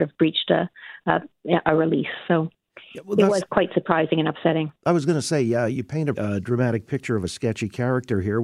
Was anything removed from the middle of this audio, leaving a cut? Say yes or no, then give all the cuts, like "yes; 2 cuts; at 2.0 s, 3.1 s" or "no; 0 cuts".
yes; 1 cut; at 6.1 s